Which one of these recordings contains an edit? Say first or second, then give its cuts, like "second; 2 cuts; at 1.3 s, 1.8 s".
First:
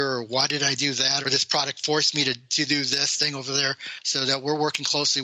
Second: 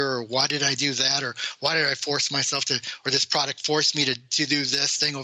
first; 1 cut; at 1.2 s